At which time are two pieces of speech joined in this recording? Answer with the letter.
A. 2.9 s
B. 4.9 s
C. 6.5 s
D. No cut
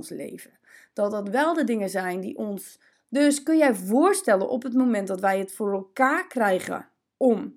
A